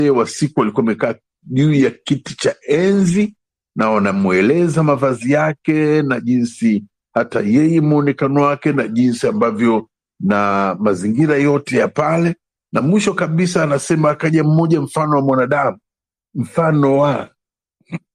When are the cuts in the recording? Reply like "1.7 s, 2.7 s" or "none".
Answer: none